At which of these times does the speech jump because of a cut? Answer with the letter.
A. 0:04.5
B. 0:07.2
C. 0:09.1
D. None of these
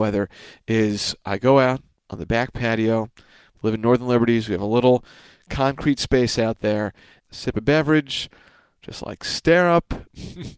B